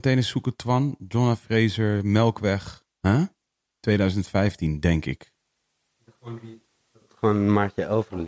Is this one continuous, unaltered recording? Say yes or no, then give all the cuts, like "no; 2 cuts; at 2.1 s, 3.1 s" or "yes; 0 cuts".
no; 1 cut; at 2.9 s